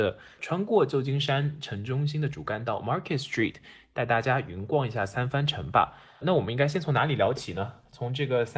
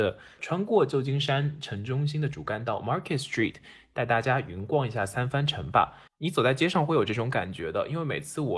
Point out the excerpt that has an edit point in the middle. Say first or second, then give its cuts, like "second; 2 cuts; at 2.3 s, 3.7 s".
second; 1 cut; at 6.1 s